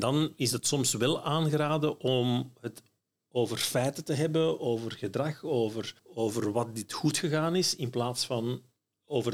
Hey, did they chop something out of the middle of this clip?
yes; 1 cut; at 6.0 s

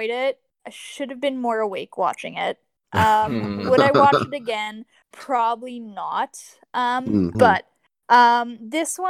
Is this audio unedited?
no; 1 cut; at 7.3 s

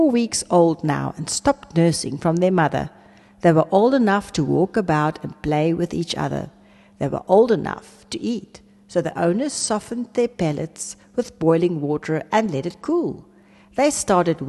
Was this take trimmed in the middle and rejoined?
no; 0 cuts

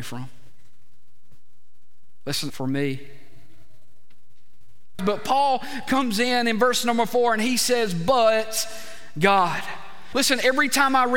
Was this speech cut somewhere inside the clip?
yes; 3 cuts; at 2.5 s, 5.0 s, 10.1 s

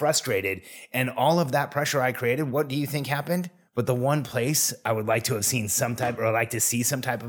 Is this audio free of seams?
no; 1 cut; at 3.7 s

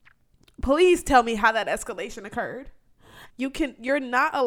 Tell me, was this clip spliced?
yes; 1 cut; at 3.3 s

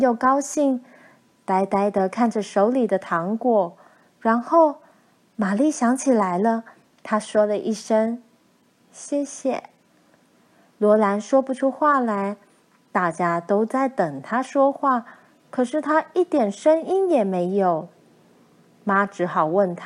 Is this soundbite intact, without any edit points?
yes; 0 cuts

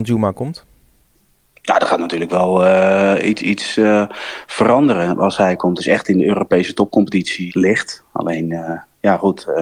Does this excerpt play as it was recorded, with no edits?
no; 2 cuts; at 5.8 s, 7.5 s

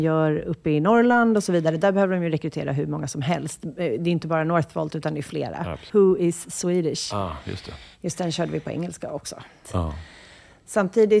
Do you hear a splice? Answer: yes; 2 cuts; at 5.9 s, 9.6 s

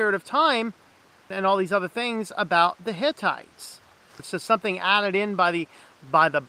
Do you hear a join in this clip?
yes; 2 cuts; at 1.3 s, 4.2 s

